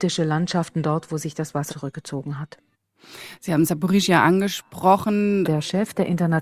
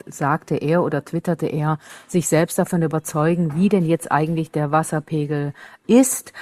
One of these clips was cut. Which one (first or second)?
first